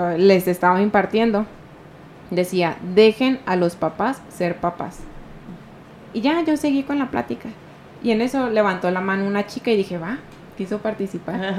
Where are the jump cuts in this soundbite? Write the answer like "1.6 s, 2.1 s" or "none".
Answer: none